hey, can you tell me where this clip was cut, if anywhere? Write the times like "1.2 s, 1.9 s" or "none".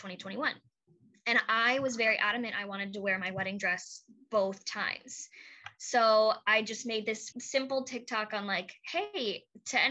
7.3 s